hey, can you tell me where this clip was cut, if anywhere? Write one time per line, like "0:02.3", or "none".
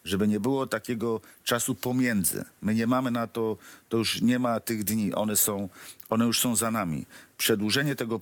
none